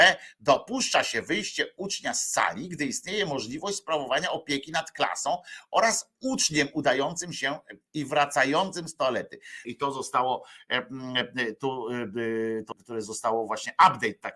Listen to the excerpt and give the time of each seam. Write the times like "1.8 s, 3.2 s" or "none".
9.6 s, 12.7 s